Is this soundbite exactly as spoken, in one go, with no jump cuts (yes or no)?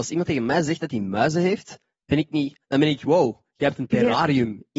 no